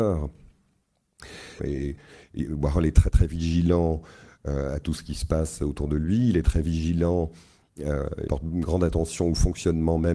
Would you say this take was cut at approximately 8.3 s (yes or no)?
yes